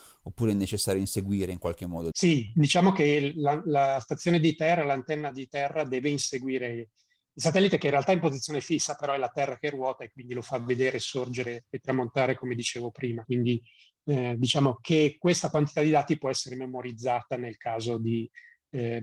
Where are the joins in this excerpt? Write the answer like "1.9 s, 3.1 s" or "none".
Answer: 2.1 s, 13.2 s